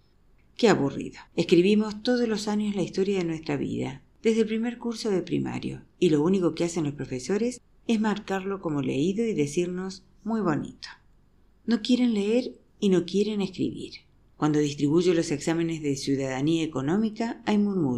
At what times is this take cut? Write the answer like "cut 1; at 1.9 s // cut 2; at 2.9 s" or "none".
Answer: cut 1; at 1.3 s // cut 2; at 11.5 s // cut 3; at 14.3 s

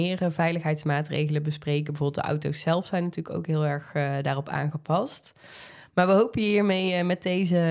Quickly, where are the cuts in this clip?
none

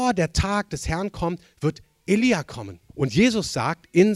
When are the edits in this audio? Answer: cut 1; at 2.9 s

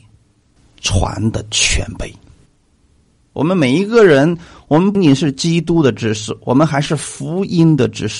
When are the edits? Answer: cut 1; at 3.2 s // cut 2; at 5.0 s

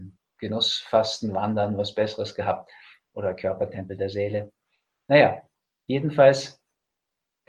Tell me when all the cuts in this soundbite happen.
none

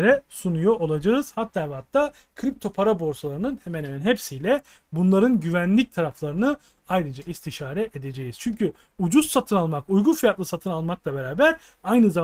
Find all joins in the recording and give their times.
none

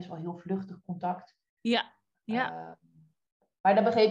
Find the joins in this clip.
cut 1; at 2.1 s

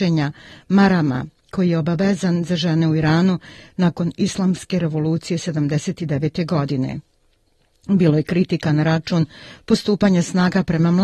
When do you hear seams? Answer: none

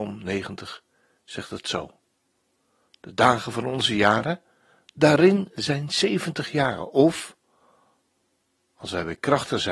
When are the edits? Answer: none

